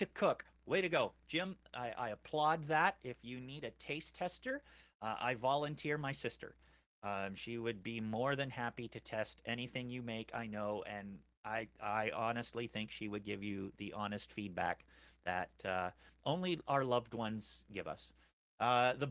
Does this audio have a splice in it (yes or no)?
no